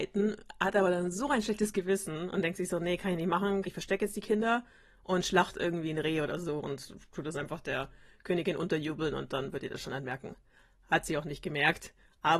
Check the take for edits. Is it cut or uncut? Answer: cut